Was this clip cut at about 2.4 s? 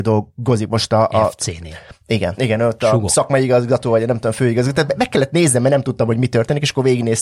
yes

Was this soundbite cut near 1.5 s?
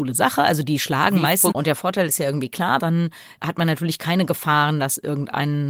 yes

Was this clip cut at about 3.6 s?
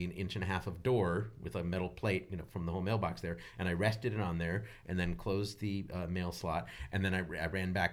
no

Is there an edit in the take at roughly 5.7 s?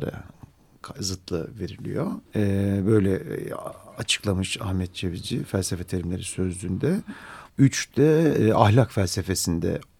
no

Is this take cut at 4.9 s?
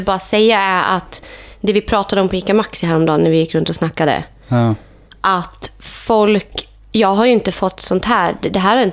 no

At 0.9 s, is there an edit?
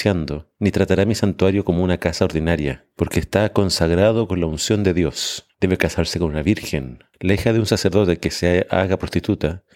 no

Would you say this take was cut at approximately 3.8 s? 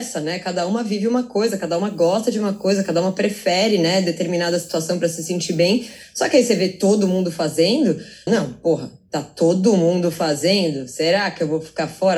no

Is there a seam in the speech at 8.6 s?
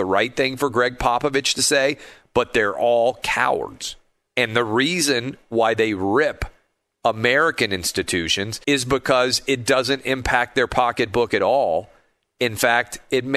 yes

